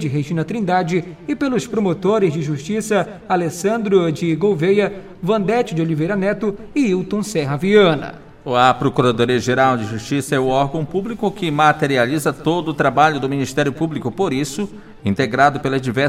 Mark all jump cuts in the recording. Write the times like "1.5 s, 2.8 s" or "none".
15.0 s